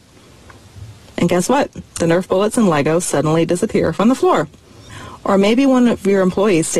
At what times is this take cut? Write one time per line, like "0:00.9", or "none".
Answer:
0:01.9